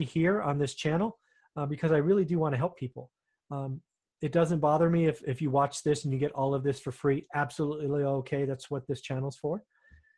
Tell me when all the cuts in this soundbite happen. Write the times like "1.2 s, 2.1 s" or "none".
none

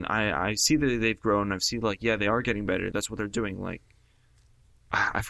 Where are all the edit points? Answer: 2.9 s

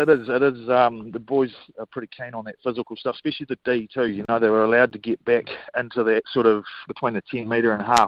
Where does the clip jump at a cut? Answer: 4.1 s, 6.9 s

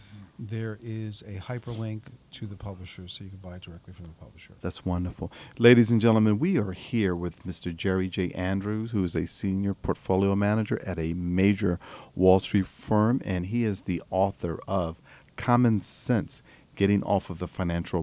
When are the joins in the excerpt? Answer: none

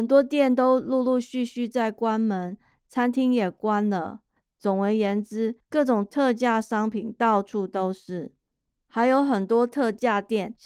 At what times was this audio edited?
4.5 s

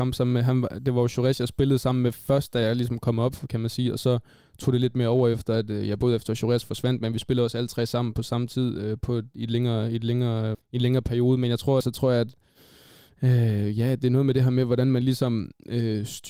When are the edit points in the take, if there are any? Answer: 10.5 s, 11.8 s

